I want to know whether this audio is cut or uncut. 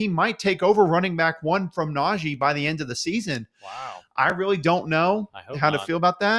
uncut